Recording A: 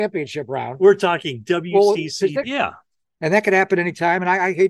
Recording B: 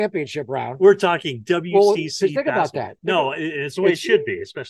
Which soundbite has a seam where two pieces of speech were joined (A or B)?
A